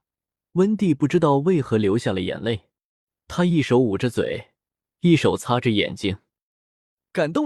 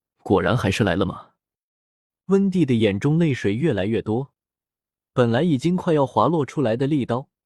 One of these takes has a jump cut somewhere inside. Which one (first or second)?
second